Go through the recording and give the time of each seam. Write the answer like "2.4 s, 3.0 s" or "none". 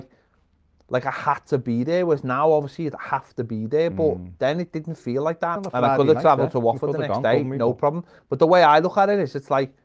5.6 s